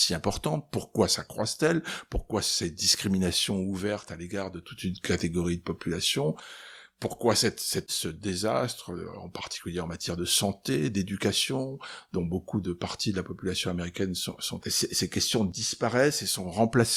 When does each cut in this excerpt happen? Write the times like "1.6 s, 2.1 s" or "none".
2.1 s, 7.9 s, 14.6 s